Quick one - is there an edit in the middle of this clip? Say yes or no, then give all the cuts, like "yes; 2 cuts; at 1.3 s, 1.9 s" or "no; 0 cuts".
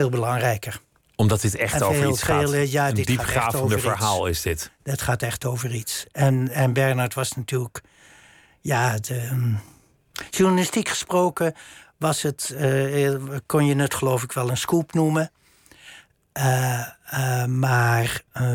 no; 0 cuts